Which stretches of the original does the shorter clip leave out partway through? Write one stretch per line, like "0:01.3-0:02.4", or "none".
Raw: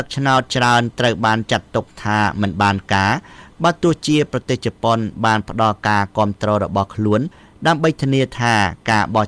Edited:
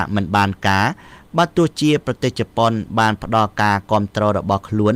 none